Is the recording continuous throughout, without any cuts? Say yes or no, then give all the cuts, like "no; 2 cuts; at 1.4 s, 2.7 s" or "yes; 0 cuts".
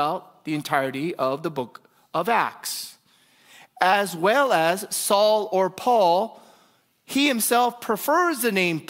yes; 0 cuts